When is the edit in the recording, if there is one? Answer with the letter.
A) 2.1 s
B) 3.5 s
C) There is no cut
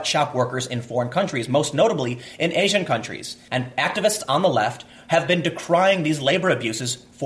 B